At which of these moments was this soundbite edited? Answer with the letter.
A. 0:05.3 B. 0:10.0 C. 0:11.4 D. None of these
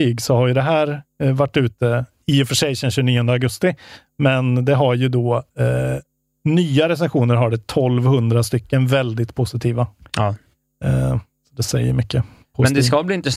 D